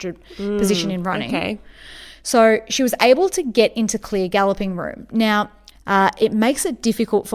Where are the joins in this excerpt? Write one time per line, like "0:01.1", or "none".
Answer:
0:05.7